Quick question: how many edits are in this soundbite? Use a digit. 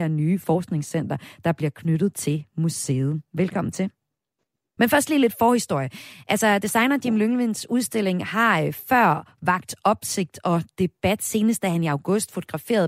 1